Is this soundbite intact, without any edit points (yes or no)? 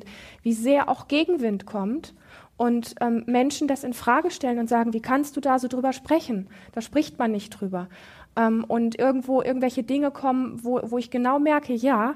yes